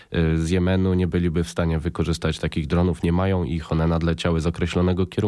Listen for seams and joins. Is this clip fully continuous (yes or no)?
yes